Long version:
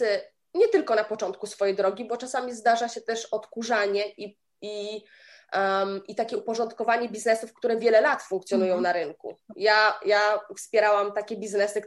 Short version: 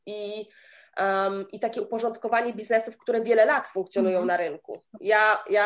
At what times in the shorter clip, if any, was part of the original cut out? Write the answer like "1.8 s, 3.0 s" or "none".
none